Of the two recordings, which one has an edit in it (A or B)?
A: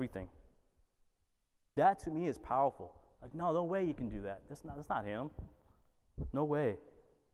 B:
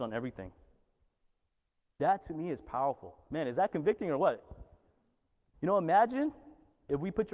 B